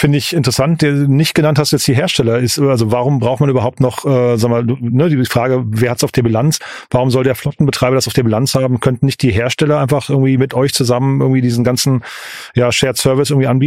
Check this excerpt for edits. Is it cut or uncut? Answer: uncut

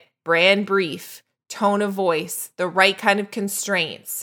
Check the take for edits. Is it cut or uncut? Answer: uncut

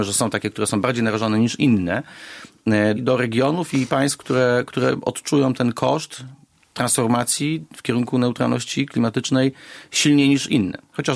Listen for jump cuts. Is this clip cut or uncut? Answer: cut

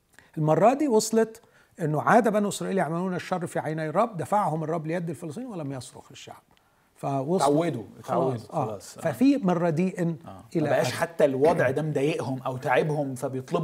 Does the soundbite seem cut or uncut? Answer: uncut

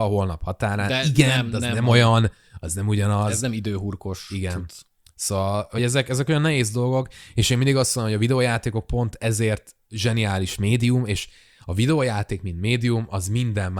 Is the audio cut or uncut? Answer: uncut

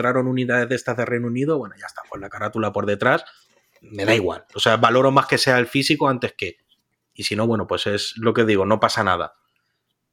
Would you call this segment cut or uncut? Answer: uncut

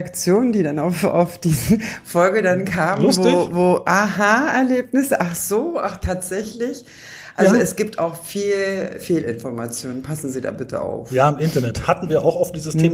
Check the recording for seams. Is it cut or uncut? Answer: uncut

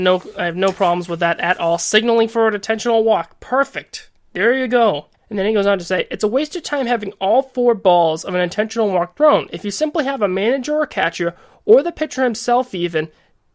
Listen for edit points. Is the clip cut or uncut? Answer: uncut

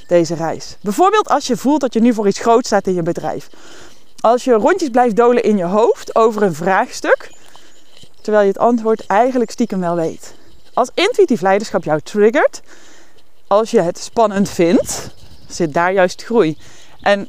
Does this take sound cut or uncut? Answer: uncut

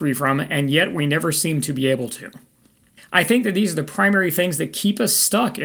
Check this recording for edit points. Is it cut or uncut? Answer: cut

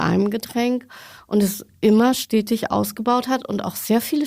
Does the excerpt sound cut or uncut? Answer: uncut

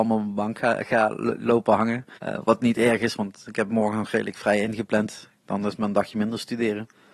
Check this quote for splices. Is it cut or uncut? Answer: cut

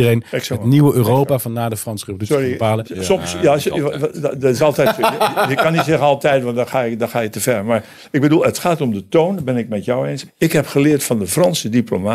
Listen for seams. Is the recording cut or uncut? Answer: cut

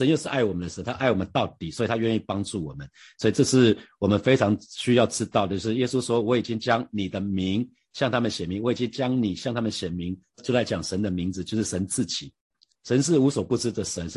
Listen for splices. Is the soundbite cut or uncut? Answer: cut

